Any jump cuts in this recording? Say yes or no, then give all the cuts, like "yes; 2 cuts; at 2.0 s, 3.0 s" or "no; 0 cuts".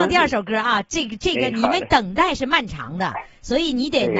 no; 0 cuts